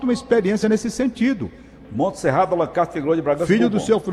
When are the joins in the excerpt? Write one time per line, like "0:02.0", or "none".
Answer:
0:01.8